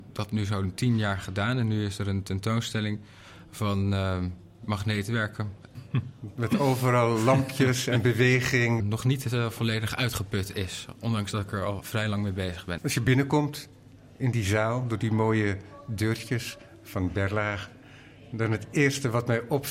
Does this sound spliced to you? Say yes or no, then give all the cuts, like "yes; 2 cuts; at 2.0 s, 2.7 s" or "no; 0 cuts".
yes; 3 cuts; at 5.7 s, 8.8 s, 12.8 s